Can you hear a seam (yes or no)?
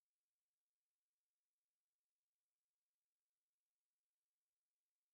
no